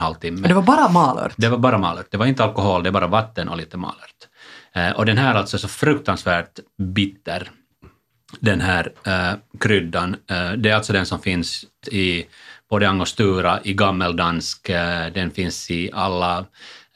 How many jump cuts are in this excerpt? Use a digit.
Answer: 1